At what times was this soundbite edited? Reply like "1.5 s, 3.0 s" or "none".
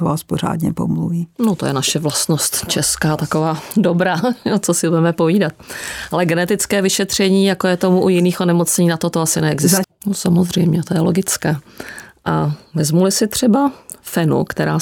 9.8 s